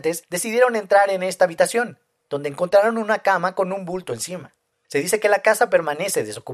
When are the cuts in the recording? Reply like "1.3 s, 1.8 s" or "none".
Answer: 4.8 s